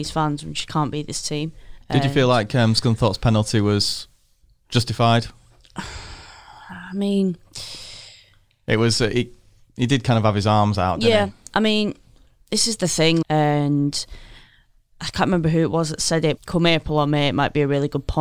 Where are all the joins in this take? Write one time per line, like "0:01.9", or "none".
0:13.2
0:16.4